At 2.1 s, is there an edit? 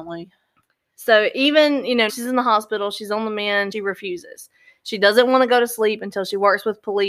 yes; 2 cuts; at 2.1 s, 3.7 s

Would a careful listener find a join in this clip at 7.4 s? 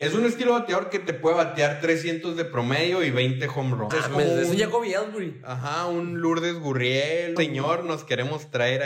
yes; 2 cuts; at 3.9 s, 7.4 s

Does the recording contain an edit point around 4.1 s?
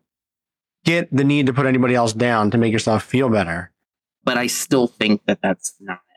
yes; 1 cut; at 4.1 s

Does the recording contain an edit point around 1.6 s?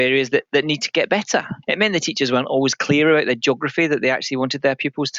yes; 1 cut; at 1.6 s

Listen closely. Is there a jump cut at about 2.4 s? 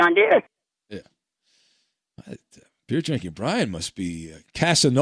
no; 0 cuts

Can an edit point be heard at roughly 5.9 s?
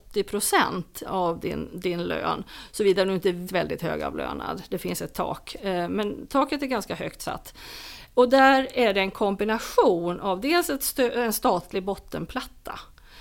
no; 2 cuts; at 1.1 s, 3.5 s

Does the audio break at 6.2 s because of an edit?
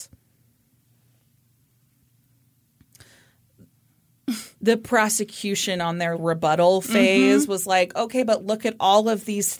yes; 1 cut; at 6.2 s

